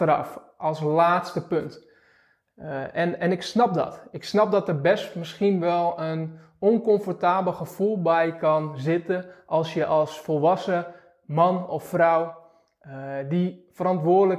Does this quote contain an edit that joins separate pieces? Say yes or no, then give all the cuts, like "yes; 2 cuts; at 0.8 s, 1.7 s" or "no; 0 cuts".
no; 0 cuts